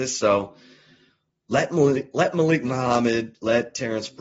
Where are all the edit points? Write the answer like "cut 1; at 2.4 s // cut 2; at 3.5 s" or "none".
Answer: none